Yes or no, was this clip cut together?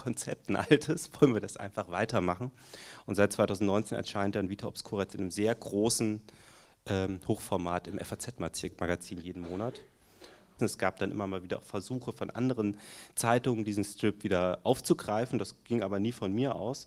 yes